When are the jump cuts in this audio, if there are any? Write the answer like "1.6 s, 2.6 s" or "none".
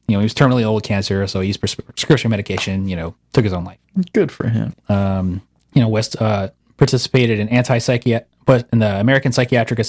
4.7 s